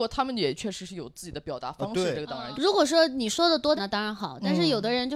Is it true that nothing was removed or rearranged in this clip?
no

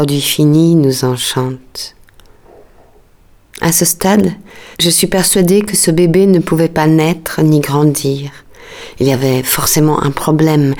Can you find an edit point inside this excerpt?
yes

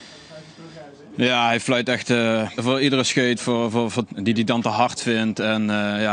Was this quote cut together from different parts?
yes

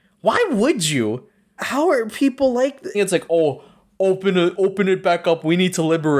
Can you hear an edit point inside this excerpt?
yes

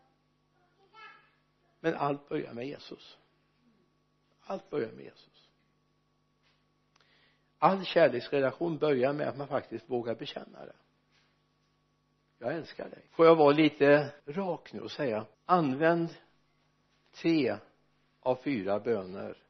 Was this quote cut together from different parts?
yes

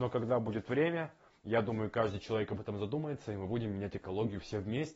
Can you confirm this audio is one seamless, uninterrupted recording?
yes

